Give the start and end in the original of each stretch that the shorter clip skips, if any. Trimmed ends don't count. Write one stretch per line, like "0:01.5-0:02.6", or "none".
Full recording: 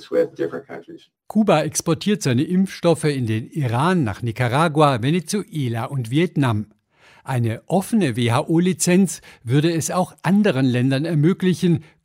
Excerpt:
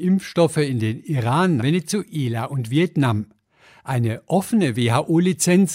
0:04.1-0:05.0